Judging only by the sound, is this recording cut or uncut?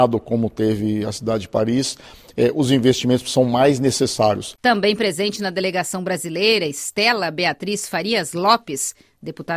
uncut